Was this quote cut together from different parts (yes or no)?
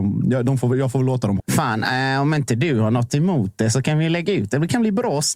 yes